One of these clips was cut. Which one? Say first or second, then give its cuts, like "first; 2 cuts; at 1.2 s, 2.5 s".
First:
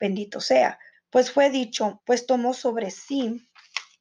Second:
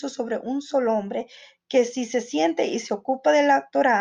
first; 2 cuts; at 0.9 s, 2.0 s